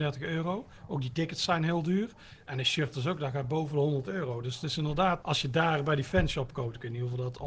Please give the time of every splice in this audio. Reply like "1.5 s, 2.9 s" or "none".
5.2 s